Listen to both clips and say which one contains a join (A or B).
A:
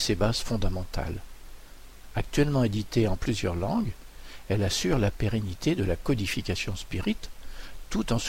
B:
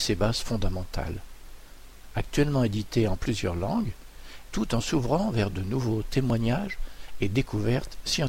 B